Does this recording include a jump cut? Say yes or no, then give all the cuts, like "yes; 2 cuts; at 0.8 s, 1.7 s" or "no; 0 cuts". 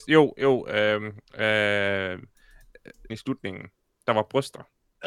yes; 1 cut; at 3.1 s